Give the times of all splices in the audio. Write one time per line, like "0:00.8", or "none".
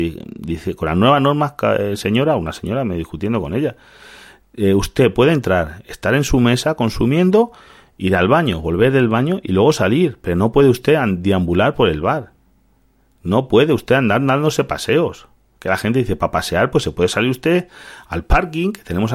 none